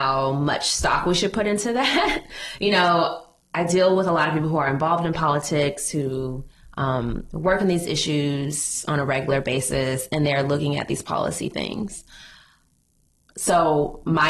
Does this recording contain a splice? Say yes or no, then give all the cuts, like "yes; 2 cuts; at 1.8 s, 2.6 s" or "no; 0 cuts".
no; 0 cuts